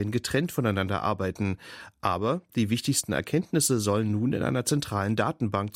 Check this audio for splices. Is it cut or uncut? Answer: uncut